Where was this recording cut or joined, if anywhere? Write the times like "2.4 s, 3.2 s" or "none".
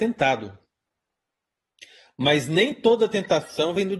none